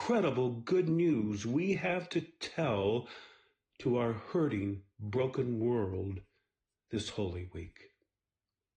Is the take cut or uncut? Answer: uncut